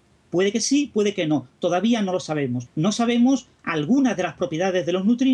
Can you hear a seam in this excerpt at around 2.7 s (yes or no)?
yes